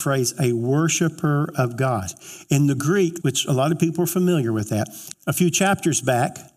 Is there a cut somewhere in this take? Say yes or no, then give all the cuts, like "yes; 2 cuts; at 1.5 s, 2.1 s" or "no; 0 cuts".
yes; 2 cuts; at 3.2 s, 5.1 s